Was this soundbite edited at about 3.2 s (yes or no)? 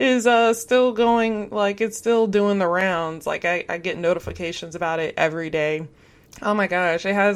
no